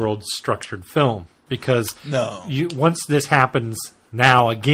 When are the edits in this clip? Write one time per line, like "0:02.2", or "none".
none